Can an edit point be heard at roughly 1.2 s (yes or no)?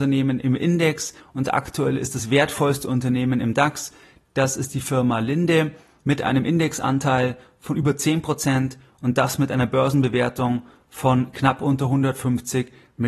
yes